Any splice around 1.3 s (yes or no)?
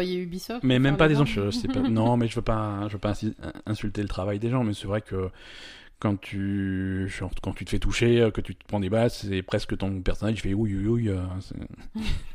yes